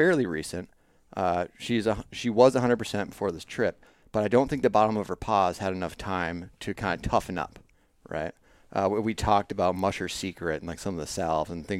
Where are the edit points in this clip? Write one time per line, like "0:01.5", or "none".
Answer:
none